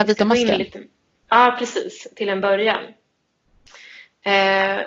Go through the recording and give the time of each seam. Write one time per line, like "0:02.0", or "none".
none